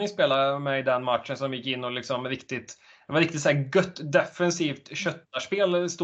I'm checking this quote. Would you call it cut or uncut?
uncut